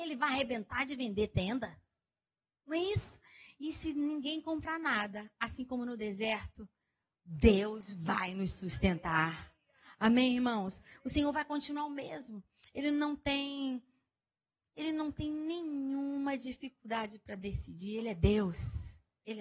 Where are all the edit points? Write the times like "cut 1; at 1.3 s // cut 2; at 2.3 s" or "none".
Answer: none